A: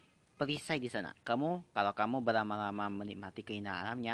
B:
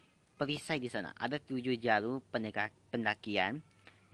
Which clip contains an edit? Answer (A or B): A